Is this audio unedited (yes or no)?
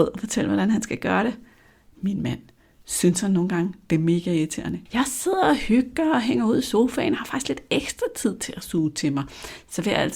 no